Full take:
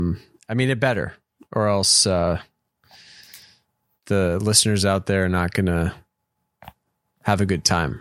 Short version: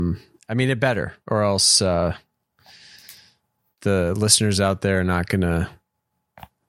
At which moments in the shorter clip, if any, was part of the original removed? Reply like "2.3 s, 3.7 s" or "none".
1.2 s